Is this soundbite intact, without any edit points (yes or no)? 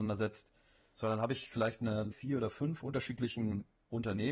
no